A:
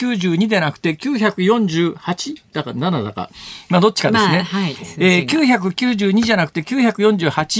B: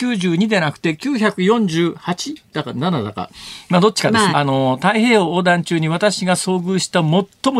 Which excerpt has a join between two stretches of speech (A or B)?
B